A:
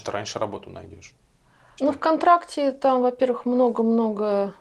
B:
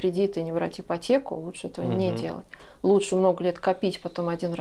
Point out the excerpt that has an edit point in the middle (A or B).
A